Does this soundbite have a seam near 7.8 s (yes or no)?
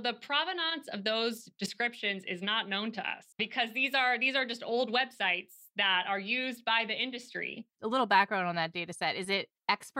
yes